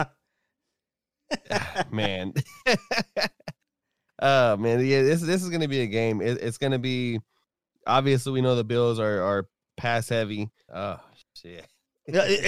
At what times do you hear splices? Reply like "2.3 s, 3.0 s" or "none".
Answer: 10.7 s